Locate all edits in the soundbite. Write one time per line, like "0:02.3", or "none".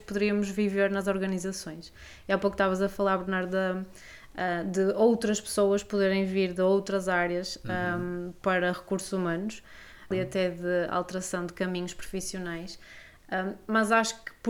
0:10.1